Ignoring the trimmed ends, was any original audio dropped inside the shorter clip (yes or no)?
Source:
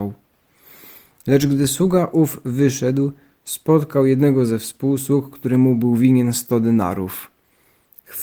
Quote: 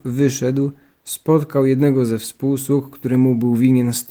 no